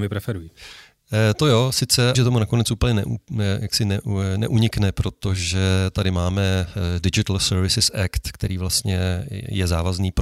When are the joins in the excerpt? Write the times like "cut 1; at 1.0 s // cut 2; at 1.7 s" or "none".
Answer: cut 1; at 2.1 s

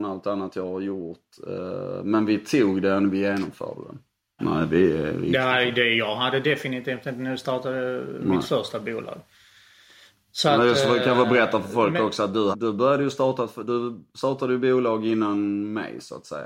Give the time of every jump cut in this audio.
cut 1; at 4.4 s // cut 2; at 12.5 s

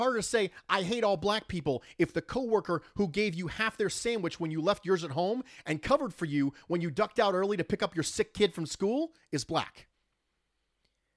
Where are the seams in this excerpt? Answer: none

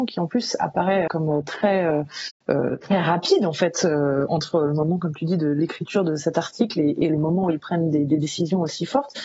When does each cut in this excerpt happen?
cut 1; at 1.1 s

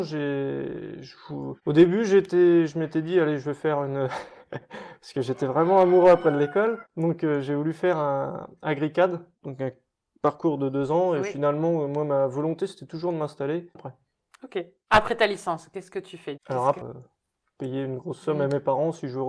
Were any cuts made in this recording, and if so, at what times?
cut 1; at 13.8 s // cut 2; at 16.8 s

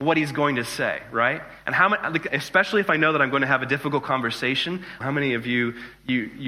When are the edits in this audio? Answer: cut 1; at 2.3 s // cut 2; at 5.0 s

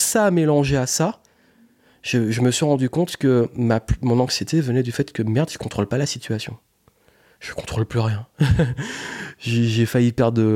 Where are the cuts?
none

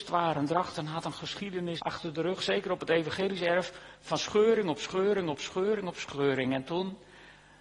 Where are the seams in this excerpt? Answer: cut 1; at 1.8 s

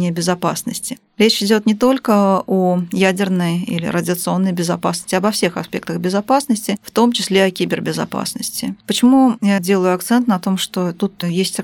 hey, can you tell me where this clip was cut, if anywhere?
none

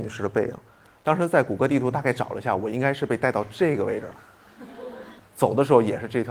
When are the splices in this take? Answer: cut 1; at 5.2 s

